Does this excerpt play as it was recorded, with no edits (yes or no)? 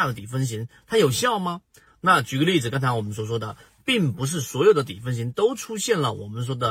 no